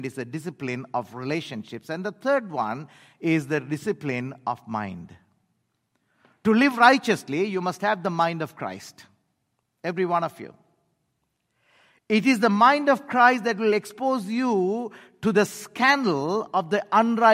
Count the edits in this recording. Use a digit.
0